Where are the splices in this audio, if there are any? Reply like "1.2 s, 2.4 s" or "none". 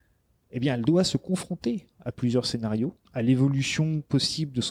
3.0 s